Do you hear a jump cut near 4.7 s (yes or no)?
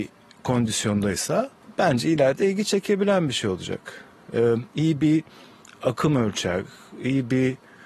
no